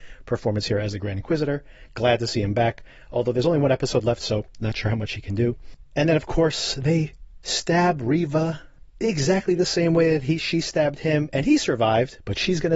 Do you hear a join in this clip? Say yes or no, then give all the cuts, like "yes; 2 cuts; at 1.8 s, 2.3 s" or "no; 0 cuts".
no; 0 cuts